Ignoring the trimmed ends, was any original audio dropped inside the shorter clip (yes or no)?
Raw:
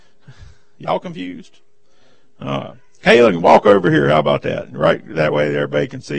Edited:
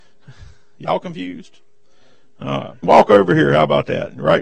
yes